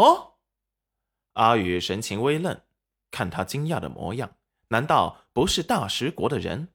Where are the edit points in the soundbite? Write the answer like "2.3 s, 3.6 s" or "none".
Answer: none